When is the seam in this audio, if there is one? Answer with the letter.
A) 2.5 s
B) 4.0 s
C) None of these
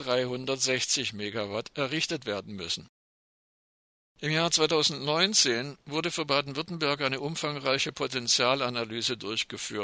B